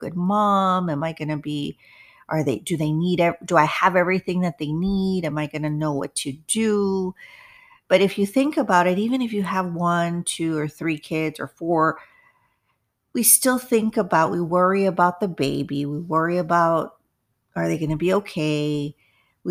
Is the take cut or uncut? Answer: uncut